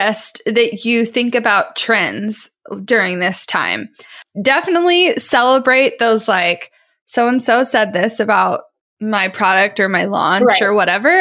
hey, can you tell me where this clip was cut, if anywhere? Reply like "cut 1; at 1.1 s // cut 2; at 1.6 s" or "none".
none